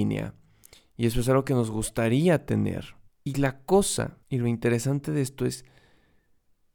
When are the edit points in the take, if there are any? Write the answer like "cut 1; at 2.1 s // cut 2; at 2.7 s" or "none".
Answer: cut 1; at 3.1 s // cut 2; at 4.2 s